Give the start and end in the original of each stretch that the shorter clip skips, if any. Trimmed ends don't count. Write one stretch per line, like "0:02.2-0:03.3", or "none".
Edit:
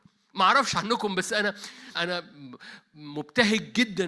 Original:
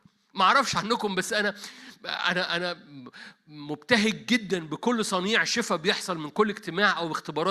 0:01.9-0:02.5